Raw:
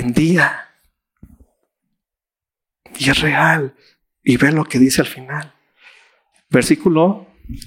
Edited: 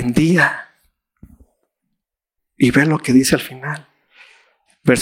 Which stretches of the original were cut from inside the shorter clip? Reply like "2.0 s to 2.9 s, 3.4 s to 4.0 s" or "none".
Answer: 2.4 s to 4.0 s